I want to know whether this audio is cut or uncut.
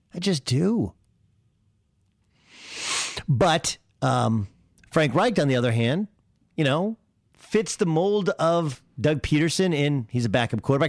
uncut